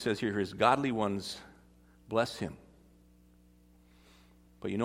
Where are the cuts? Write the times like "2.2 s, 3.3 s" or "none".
none